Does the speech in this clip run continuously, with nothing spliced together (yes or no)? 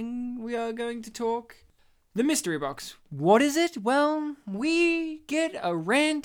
yes